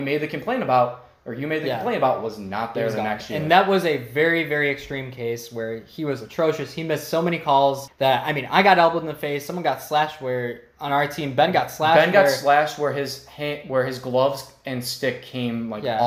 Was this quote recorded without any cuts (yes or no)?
yes